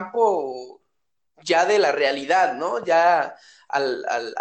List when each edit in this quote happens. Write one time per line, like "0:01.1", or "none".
none